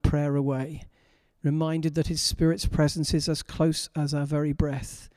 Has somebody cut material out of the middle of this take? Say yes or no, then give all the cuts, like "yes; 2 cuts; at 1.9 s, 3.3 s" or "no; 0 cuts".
no; 0 cuts